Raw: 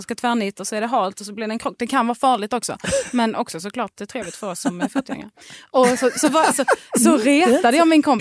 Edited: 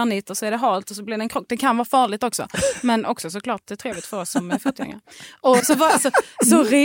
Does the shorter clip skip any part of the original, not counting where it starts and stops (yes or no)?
yes